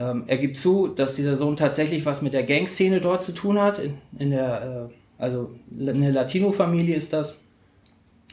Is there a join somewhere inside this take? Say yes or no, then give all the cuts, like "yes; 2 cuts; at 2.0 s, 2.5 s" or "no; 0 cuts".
no; 0 cuts